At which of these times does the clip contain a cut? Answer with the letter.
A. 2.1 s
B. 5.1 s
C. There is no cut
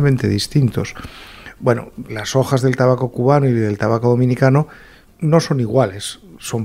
A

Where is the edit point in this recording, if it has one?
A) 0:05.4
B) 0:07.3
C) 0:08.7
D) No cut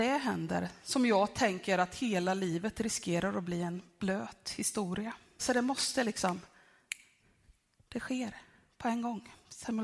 A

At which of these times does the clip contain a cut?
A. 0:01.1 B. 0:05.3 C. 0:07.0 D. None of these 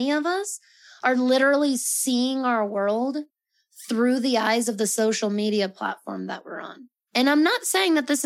D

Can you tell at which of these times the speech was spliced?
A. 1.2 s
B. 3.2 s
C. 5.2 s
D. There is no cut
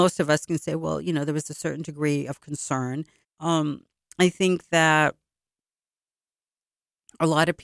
B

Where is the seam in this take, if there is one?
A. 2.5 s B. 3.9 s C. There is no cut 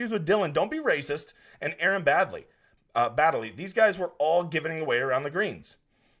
C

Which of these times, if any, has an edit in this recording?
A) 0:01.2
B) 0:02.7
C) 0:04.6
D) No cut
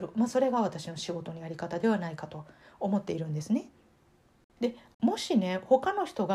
C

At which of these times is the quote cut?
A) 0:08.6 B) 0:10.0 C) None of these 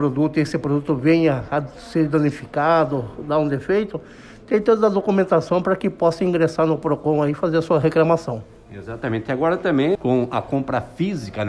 B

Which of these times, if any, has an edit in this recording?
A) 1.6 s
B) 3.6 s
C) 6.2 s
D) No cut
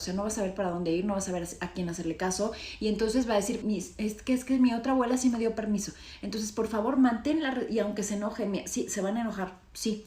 B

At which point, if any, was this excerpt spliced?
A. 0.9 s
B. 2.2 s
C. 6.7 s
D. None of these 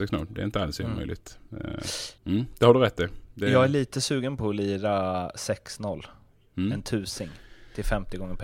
B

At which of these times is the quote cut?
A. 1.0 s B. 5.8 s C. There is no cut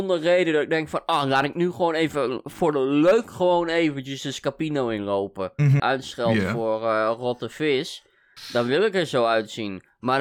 B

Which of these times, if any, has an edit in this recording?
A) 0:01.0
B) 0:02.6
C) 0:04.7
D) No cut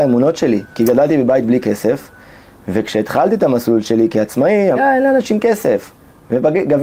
C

